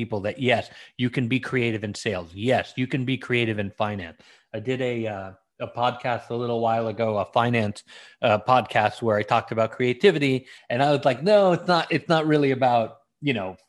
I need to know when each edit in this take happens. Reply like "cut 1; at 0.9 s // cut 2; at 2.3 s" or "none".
cut 1; at 10.6 s